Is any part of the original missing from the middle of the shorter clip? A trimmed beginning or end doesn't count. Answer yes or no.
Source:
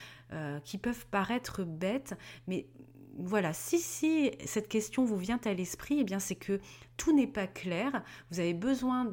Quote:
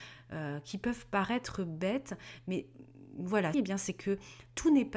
yes